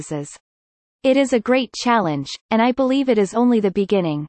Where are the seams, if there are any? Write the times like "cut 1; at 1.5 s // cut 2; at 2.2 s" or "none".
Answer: cut 1; at 1.0 s